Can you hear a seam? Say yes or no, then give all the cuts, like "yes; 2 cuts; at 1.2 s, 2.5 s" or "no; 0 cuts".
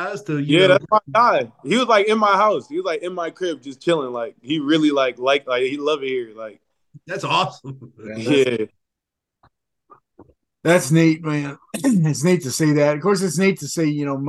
no; 0 cuts